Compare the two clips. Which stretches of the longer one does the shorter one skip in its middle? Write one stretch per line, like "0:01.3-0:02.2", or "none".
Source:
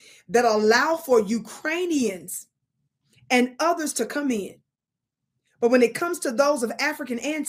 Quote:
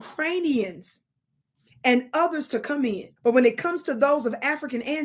0:04.6-0:05.5

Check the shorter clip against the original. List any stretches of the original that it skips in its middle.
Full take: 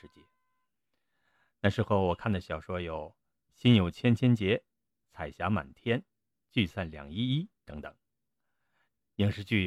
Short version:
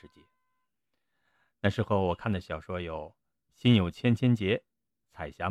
none

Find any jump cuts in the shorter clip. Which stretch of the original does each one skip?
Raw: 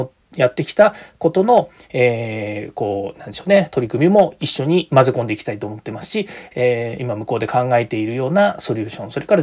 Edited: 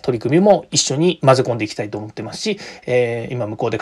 none

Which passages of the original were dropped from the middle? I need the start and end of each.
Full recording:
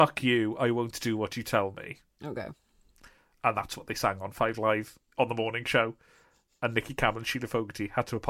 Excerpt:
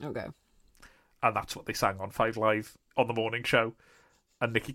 none

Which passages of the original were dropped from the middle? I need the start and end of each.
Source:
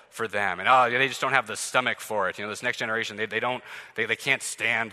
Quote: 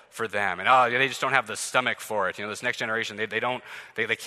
none

